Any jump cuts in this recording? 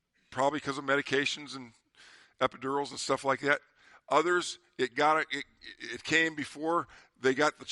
no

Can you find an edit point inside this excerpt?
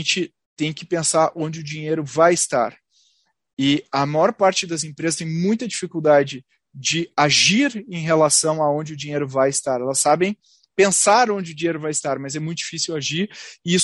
no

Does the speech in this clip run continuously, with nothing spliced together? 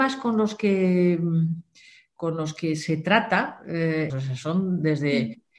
no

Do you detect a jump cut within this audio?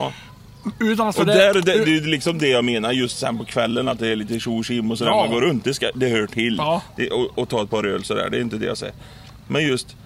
no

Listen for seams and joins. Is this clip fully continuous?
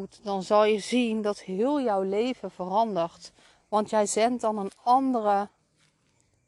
yes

